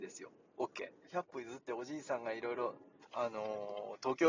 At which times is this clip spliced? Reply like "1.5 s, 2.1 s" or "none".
1.1 s, 3.0 s

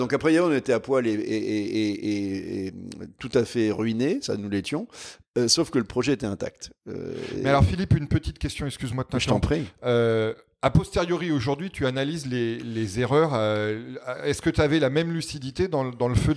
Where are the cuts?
none

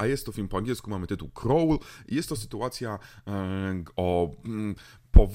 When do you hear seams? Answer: none

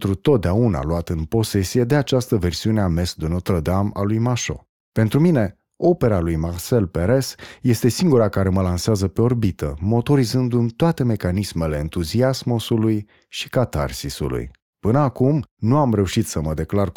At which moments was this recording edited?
4.8 s, 14.7 s

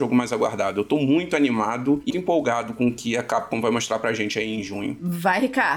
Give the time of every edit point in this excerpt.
2.1 s

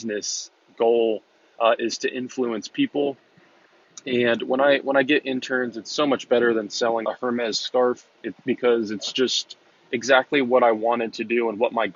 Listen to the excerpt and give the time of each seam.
7.0 s, 8.1 s

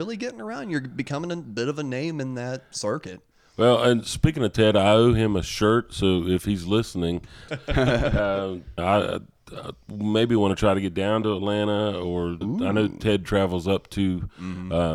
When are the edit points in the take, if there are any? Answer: 7.5 s, 8.8 s, 12.4 s

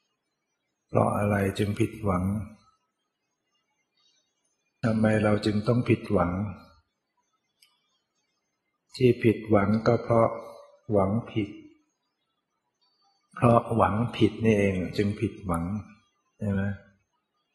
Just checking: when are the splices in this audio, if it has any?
none

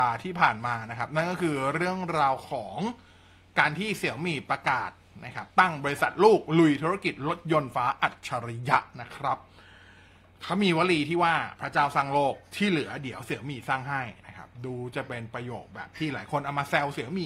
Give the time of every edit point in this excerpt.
7.7 s

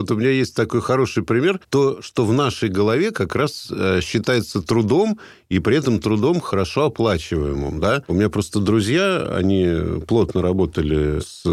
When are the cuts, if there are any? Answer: 8.0 s

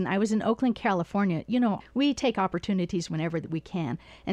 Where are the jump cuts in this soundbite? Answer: 1.8 s

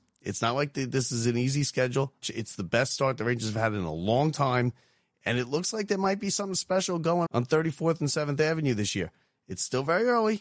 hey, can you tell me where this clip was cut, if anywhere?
2.2 s, 7.3 s

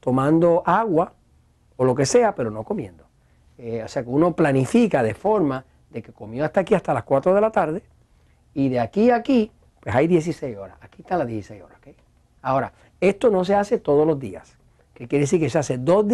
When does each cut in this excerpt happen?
12.4 s, 14.8 s

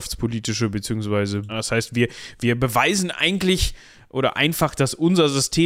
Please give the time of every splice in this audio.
1.5 s

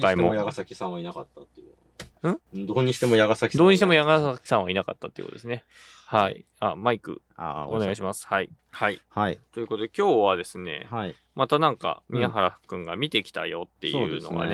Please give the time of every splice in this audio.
none

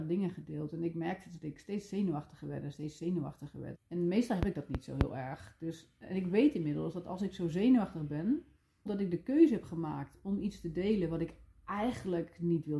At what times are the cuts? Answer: 3.7 s, 8.9 s

